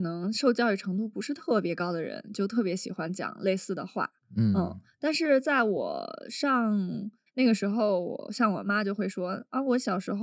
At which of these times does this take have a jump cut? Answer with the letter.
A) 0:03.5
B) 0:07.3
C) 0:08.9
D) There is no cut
B